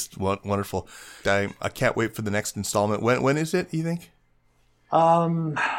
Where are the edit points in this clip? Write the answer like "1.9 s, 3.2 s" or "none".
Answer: 1.2 s